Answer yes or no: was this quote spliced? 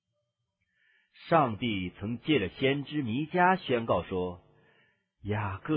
no